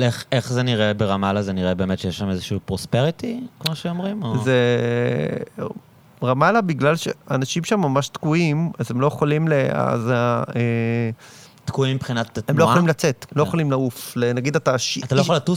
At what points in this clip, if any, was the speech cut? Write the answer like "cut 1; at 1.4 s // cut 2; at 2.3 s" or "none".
cut 1; at 13.3 s